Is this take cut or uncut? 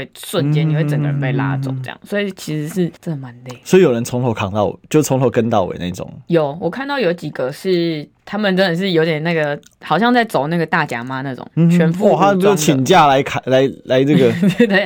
cut